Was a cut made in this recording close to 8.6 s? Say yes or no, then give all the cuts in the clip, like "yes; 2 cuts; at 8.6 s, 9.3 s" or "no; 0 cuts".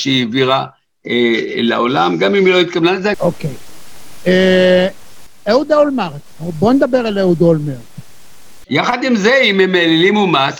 yes; 2 cuts; at 3.1 s, 8.6 s